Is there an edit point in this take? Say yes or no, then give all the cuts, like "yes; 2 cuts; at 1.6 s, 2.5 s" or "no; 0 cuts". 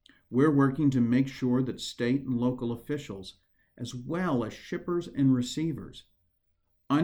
no; 0 cuts